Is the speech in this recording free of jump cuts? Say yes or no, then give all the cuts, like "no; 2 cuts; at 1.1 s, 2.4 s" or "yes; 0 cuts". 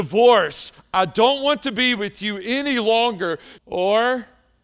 no; 1 cut; at 3.6 s